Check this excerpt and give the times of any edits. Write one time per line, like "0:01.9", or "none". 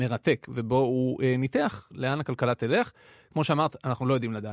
none